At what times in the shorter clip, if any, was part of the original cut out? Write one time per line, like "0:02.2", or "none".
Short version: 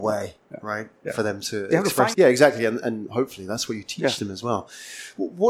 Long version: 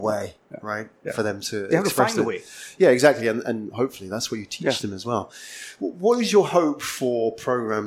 0:02.1